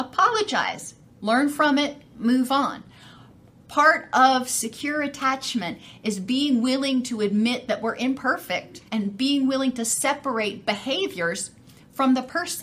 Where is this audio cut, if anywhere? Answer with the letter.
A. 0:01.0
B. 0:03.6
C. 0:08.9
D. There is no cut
C